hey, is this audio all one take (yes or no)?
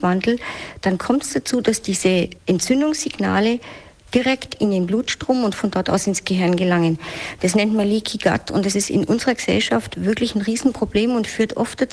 yes